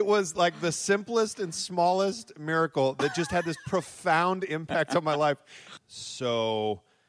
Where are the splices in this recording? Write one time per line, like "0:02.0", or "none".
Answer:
0:05.8

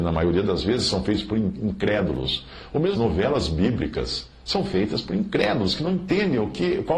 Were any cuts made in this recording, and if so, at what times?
0:02.9

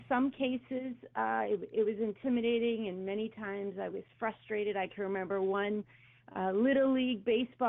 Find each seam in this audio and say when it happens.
none

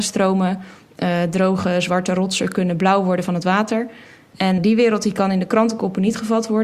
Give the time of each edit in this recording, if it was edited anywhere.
0:04.6

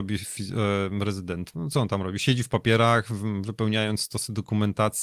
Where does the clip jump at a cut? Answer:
0:01.5

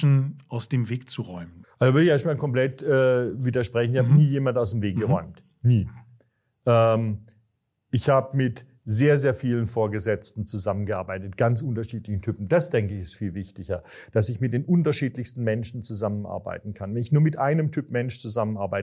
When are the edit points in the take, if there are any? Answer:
0:01.6

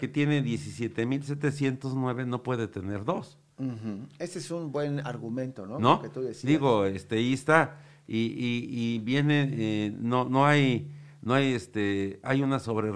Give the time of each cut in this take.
none

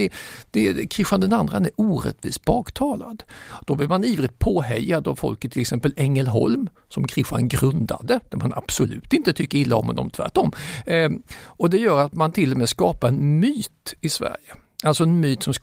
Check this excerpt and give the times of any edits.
none

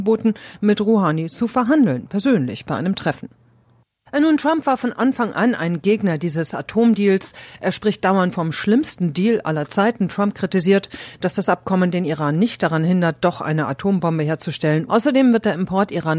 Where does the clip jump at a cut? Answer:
0:04.1
0:14.9

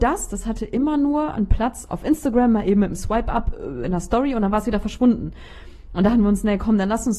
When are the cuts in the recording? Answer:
0:03.8

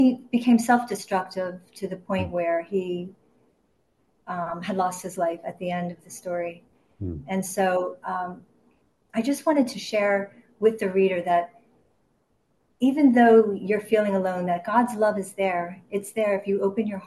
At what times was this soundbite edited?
none

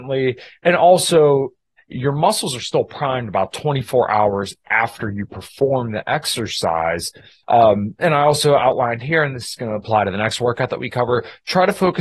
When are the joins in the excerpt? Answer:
0:01.8
0:07.4

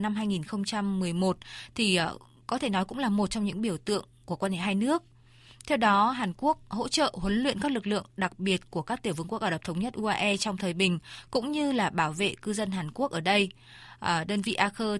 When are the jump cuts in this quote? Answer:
none

